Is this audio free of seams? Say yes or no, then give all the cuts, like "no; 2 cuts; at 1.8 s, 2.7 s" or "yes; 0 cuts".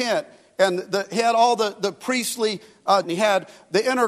no; 1 cut; at 3.0 s